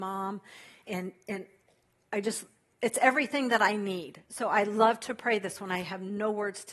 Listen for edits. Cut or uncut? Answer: uncut